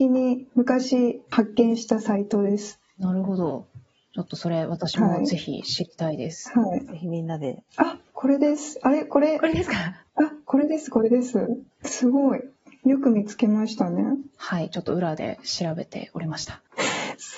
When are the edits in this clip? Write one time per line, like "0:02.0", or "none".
0:07.7